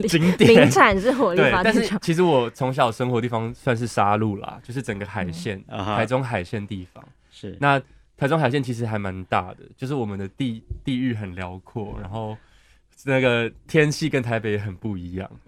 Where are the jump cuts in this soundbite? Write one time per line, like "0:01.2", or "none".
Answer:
none

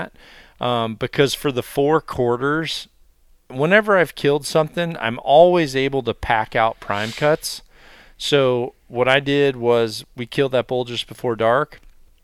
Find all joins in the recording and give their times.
none

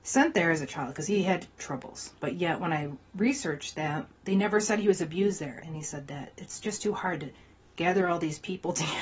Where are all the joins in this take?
0:02.2
0:05.6

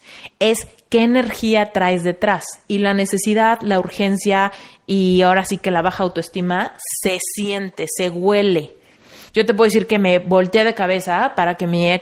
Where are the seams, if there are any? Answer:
0:09.3

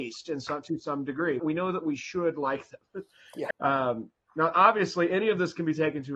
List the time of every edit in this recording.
0:01.4
0:03.5

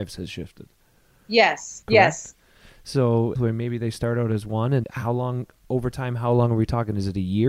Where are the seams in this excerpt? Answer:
0:01.8
0:03.4
0:04.8

